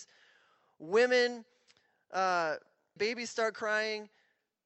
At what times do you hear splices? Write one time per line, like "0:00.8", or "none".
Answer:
0:03.0